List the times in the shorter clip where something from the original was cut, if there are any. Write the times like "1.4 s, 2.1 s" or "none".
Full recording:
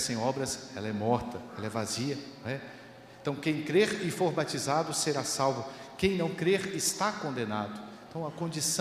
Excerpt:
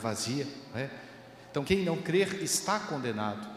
1.6 s